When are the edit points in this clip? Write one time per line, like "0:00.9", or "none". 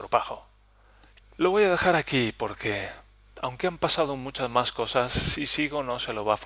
0:01.2